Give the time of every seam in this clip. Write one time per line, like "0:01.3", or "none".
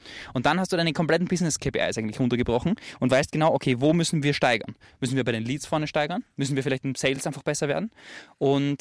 none